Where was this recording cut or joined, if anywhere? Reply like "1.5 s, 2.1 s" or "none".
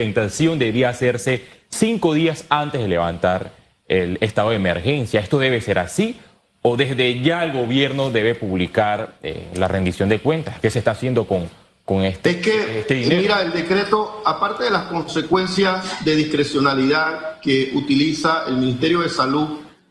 none